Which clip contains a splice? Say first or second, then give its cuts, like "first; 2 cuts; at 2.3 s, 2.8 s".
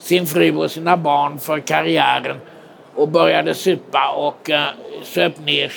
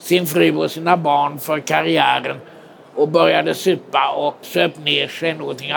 second; 1 cut; at 4.4 s